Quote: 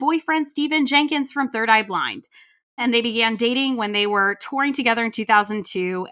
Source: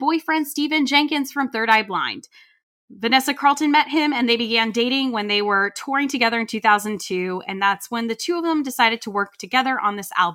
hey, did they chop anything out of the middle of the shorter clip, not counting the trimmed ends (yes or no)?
yes